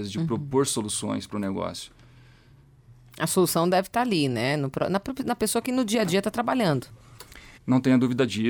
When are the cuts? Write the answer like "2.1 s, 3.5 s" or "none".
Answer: 7.6 s